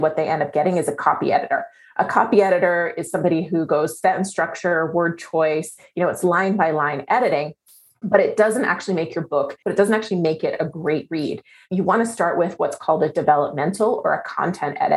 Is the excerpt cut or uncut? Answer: cut